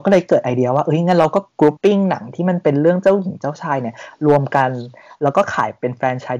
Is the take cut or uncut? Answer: cut